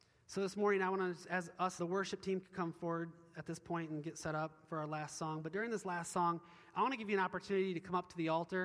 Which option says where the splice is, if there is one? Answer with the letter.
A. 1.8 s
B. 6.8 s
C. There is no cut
A